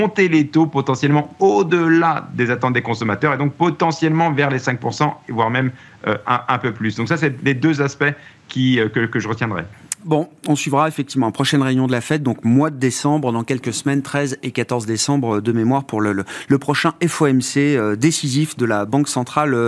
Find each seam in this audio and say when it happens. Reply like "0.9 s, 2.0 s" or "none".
none